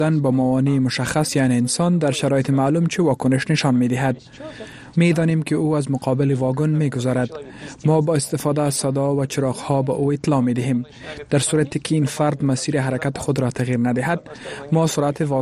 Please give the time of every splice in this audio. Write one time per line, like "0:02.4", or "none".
0:04.9